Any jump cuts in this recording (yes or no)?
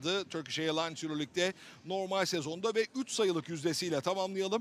no